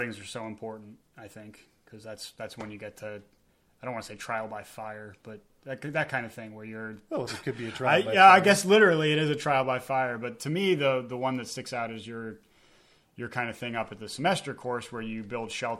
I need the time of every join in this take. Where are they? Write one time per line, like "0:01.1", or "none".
0:07.3